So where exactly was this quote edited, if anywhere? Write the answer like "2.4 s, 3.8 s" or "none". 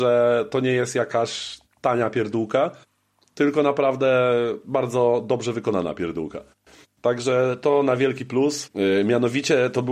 8.7 s